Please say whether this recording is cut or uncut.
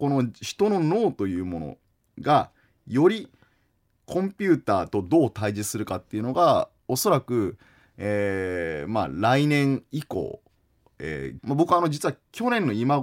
cut